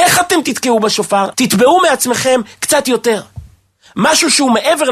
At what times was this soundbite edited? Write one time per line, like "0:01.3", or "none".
0:01.3

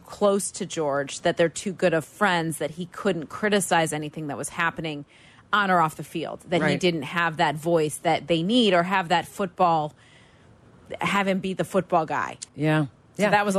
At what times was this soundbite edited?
0:12.5

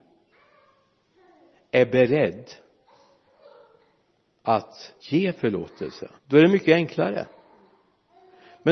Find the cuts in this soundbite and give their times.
0:05.0
0:06.2

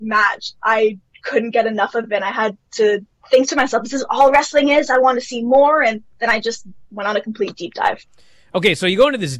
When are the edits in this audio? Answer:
0:06.8

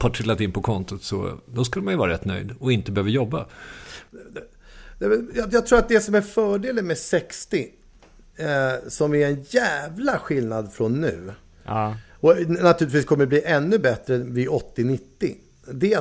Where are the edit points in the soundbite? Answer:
none

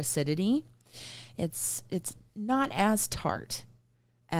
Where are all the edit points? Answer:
0:01.4

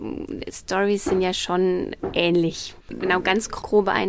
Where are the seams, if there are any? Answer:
0:02.8

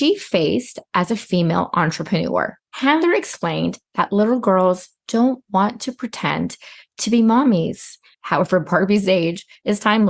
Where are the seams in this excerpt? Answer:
0:02.7
0:08.1

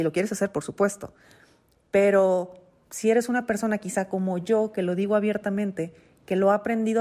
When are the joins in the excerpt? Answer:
none

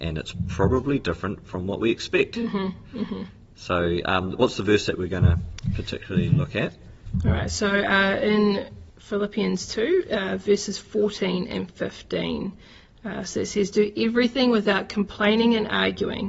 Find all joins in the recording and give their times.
0:08.9

